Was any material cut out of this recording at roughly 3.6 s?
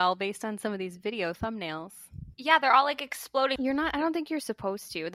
yes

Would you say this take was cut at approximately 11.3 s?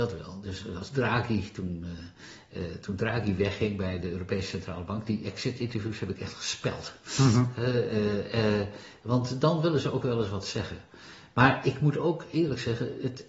no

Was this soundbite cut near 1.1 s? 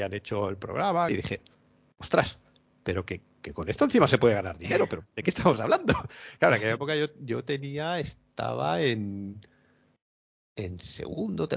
yes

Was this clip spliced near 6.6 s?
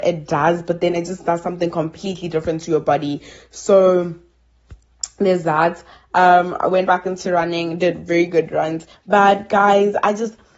no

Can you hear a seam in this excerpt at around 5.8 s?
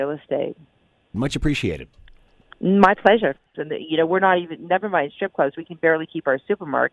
no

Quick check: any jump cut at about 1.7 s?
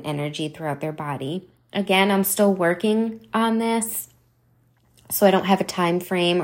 no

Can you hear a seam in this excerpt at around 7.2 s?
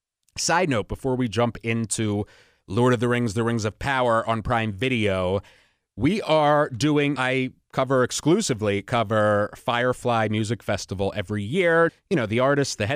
yes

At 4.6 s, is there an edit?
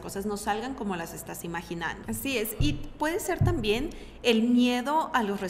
no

